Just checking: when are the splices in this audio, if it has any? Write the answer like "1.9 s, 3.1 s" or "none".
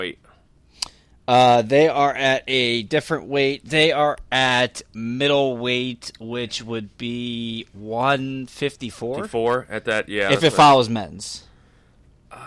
none